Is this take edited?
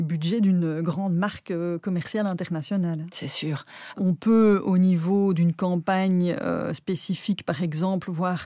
yes; 1 cut; at 3.9 s

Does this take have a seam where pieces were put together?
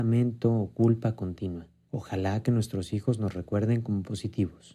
yes; 1 cut; at 1.9 s

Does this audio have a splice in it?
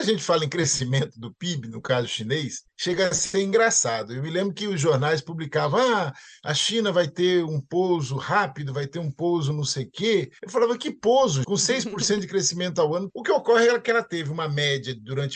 yes; 2 cuts; at 11.4 s, 13.1 s

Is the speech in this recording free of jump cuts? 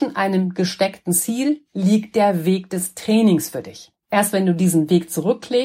no; 1 cut; at 4.0 s

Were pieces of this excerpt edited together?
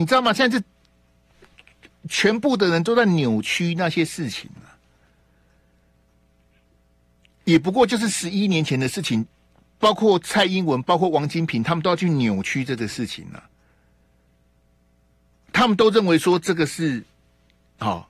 no; 0 cuts

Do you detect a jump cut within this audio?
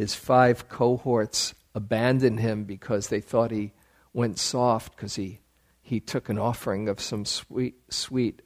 no; 0 cuts

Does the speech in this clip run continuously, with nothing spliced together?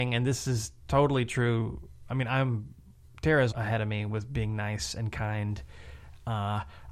no; 1 cut; at 3.5 s

